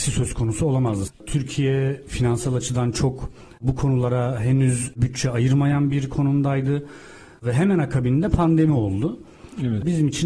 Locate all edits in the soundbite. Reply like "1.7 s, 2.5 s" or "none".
1.1 s